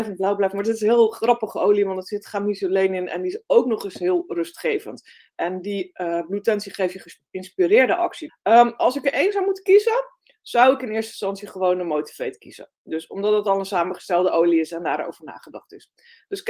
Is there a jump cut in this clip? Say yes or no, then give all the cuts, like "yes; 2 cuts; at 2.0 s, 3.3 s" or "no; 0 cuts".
yes; 1 cut; at 8.3 s